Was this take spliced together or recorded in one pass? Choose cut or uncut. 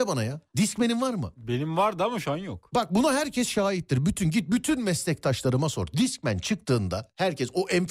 uncut